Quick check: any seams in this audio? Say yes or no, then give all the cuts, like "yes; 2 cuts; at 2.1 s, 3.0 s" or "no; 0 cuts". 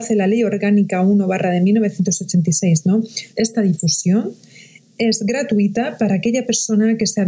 yes; 1 cut; at 3.3 s